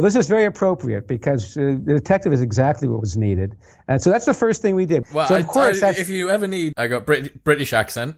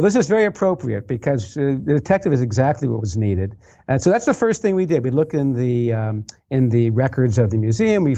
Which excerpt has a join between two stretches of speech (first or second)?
first